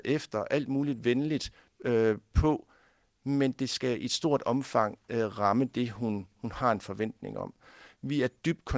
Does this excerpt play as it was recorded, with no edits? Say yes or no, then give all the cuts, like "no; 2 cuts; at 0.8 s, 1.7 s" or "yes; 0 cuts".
yes; 0 cuts